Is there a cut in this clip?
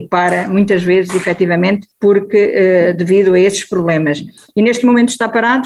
no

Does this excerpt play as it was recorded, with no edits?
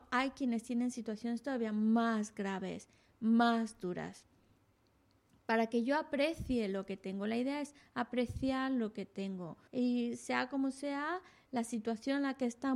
no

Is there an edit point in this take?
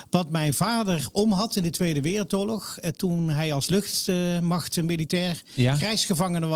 no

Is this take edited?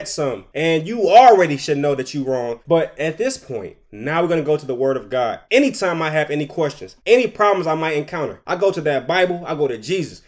no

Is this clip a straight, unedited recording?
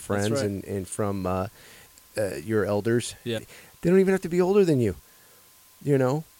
no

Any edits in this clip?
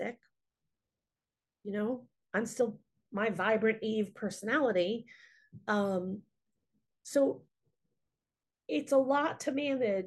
no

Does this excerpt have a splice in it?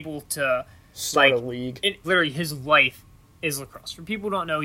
yes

